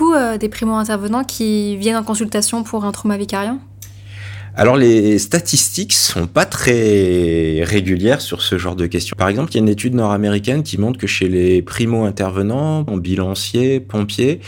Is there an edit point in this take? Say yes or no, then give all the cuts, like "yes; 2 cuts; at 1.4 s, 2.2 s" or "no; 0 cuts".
yes; 2 cuts; at 9.1 s, 12.9 s